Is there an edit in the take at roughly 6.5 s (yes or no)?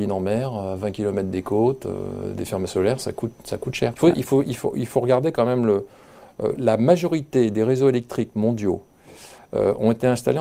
yes